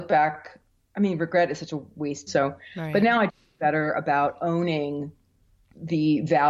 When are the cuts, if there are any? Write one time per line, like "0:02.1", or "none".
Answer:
0:02.3
0:03.3